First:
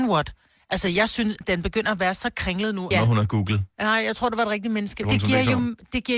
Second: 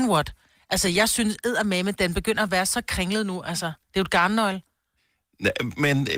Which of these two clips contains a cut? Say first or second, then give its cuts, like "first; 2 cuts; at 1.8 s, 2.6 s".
first; 3 cuts; at 1.4 s, 2.9 s, 5.0 s